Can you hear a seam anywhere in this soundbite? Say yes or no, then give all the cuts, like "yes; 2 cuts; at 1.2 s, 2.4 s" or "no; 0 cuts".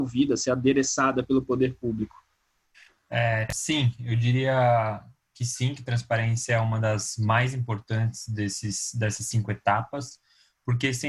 no; 0 cuts